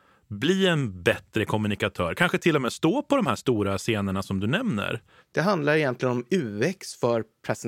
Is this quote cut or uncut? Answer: cut